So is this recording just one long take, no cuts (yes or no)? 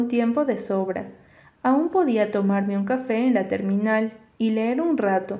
yes